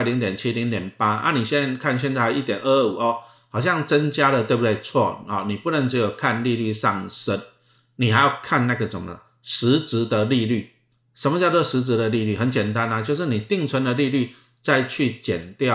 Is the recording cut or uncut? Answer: uncut